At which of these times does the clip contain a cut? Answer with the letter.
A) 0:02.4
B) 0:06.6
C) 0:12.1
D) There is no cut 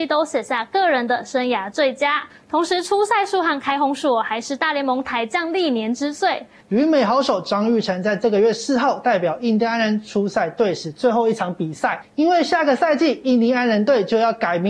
B